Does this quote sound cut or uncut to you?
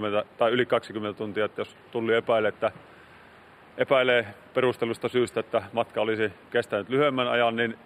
uncut